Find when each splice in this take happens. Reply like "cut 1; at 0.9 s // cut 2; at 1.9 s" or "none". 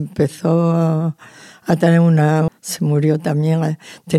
cut 1; at 2.5 s